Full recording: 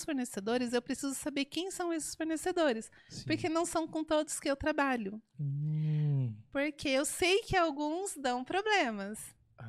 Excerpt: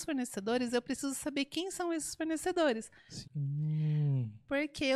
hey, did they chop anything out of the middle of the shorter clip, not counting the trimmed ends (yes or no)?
yes